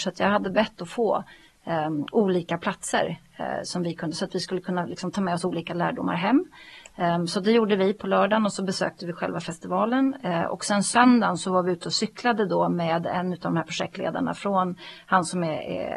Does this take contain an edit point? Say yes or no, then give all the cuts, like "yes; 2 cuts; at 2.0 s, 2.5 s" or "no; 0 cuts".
no; 0 cuts